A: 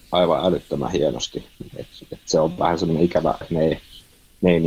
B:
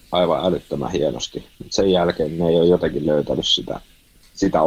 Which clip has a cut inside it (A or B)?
A